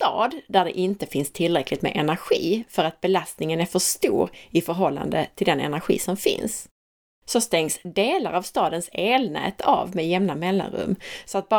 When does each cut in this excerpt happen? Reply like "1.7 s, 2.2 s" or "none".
none